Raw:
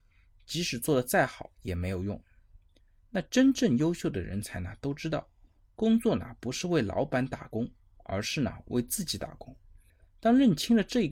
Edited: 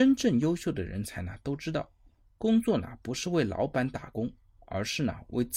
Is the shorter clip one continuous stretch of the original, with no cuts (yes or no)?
yes